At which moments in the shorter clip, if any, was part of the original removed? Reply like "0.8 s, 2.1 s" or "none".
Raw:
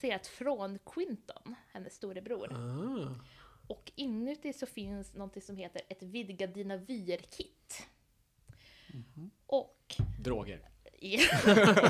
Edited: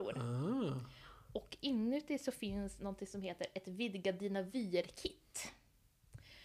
none